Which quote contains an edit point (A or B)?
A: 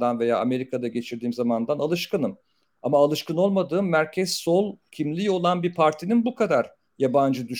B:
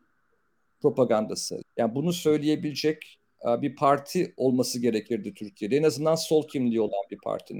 B